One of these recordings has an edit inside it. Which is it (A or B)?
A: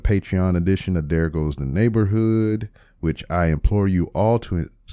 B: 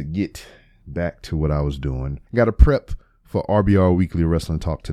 B